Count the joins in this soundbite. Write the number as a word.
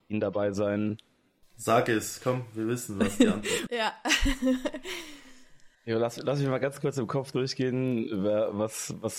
three